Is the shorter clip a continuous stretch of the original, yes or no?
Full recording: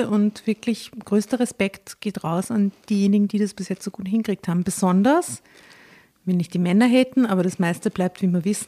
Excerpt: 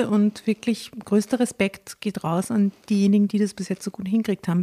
yes